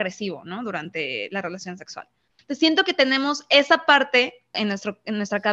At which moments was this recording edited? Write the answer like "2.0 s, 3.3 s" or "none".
2.4 s, 4.5 s